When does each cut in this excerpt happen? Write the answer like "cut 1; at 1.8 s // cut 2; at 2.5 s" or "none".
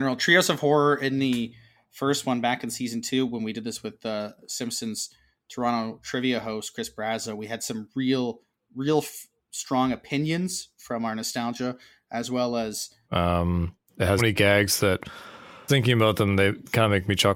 cut 1; at 13.0 s // cut 2; at 14.2 s // cut 3; at 15.7 s